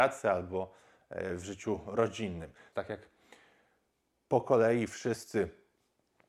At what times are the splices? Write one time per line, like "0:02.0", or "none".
0:02.7